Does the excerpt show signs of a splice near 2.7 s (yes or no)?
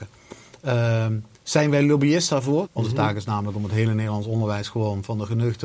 yes